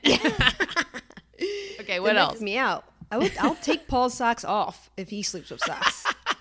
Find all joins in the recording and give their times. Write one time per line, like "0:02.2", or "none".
0:02.4